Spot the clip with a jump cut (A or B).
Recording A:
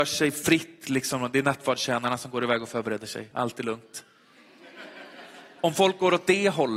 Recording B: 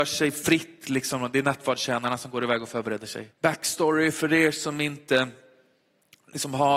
B